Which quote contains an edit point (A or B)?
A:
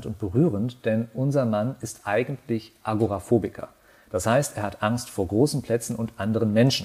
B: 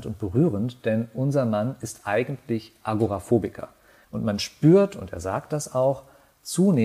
B